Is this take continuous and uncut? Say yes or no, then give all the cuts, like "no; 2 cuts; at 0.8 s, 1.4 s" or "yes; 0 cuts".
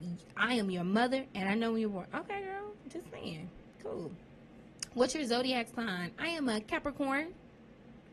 yes; 0 cuts